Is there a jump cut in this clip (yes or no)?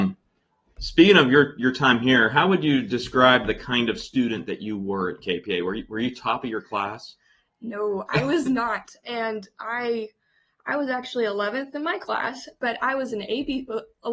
no